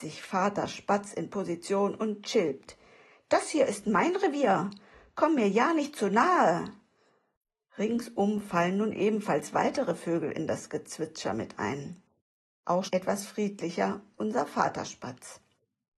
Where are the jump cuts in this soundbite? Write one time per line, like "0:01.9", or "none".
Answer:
0:12.9